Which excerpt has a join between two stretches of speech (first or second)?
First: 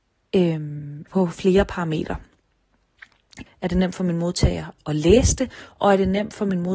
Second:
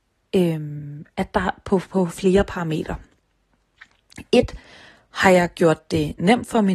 first